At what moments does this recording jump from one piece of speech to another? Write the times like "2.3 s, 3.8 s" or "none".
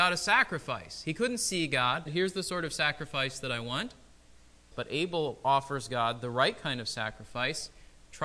2.1 s, 4.7 s